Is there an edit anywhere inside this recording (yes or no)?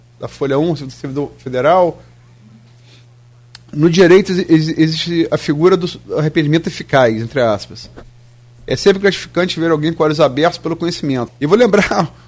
yes